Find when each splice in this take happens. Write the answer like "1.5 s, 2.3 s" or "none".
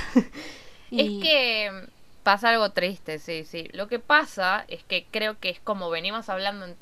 2.2 s, 3.7 s

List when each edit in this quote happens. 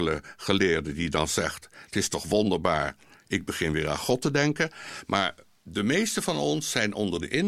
none

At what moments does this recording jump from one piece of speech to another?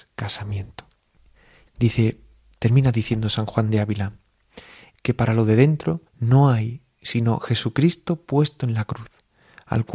1.7 s, 4.9 s, 6.1 s

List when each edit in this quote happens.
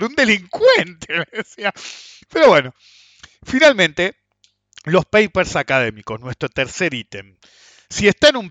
none

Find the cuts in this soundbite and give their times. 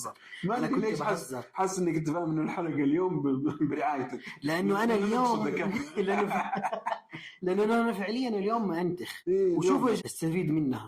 10.0 s

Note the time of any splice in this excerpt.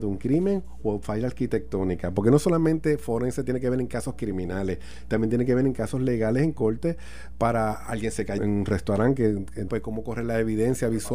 8.4 s, 9.7 s

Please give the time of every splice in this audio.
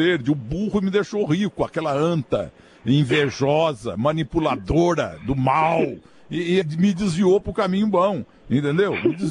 6.6 s

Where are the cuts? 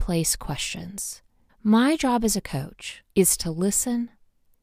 1.5 s, 3.1 s

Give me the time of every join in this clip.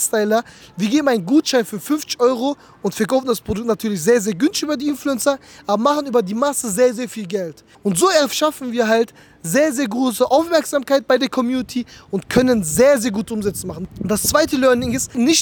7.7 s, 13.9 s

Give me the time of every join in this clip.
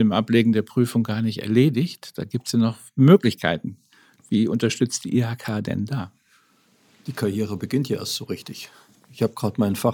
none

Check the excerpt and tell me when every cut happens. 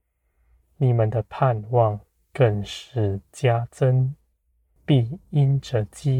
4.8 s

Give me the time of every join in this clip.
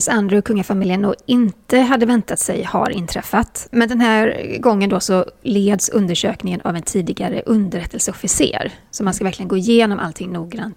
3.7 s

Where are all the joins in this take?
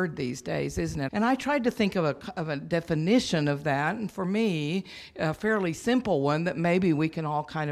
1.1 s

